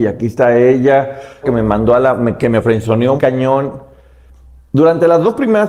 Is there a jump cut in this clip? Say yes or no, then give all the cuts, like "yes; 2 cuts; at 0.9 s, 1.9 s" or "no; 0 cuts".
yes; 2 cuts; at 1.4 s, 3.2 s